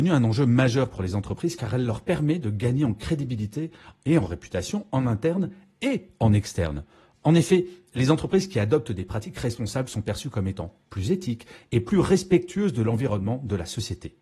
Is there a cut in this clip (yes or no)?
no